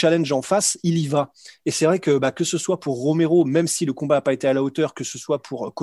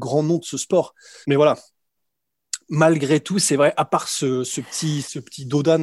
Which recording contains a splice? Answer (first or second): second